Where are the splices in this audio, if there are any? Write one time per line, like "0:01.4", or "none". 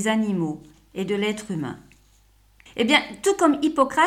0:02.7